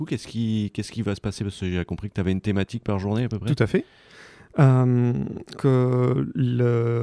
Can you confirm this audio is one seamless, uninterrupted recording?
no; 1 cut; at 5.5 s

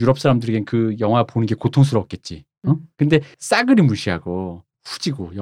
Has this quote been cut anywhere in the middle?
yes; 1 cut; at 2.9 s

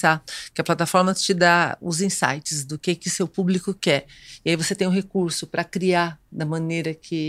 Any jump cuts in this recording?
no; 0 cuts

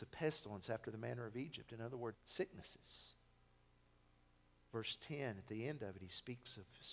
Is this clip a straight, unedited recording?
no; 1 cut; at 2.1 s

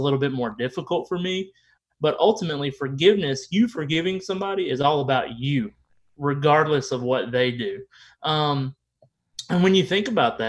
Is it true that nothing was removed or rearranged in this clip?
yes; 0 cuts

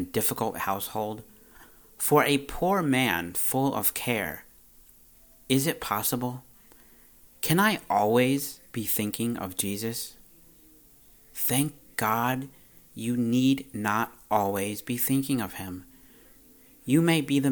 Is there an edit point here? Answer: no; 0 cuts

